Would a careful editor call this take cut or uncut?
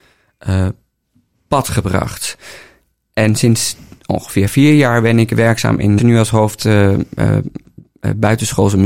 cut